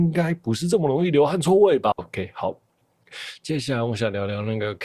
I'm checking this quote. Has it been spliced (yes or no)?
yes